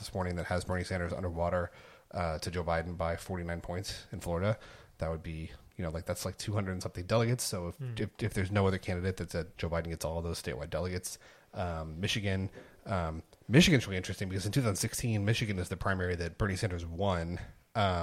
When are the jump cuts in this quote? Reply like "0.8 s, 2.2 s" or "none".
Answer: 9.5 s